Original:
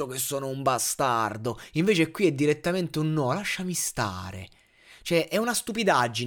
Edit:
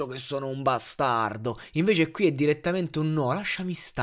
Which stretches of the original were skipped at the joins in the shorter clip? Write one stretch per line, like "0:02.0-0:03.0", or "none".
none